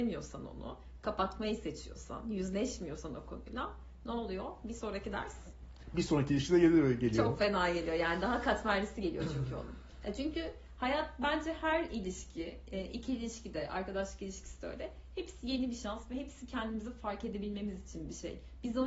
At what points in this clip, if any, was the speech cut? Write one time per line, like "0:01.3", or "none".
none